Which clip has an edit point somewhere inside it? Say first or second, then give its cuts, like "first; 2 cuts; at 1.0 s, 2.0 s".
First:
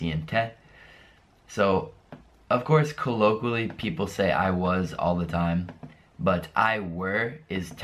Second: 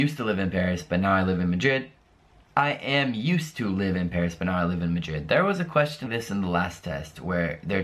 second; 1 cut; at 6.1 s